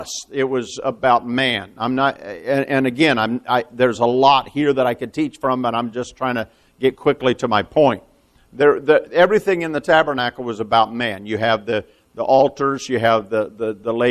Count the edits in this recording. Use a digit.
0